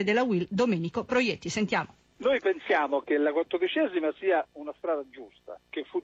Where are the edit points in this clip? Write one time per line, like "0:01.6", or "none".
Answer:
none